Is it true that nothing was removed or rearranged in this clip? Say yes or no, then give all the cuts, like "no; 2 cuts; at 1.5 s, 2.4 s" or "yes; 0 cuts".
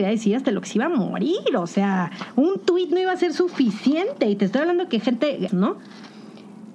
no; 1 cut; at 5.5 s